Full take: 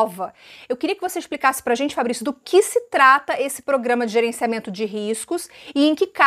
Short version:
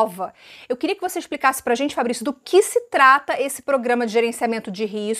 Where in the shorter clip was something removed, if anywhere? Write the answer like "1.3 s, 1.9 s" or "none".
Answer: none